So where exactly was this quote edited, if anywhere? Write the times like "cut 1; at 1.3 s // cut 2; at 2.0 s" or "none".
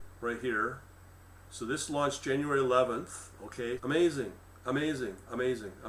cut 1; at 3.8 s